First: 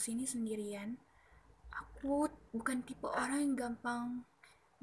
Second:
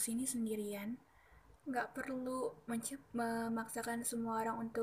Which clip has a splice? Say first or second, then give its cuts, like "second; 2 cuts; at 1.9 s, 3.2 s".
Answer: second; 1 cut; at 1.5 s